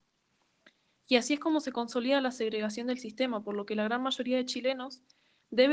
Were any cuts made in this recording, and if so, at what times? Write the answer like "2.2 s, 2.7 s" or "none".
none